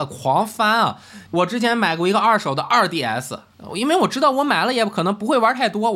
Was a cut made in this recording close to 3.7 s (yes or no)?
no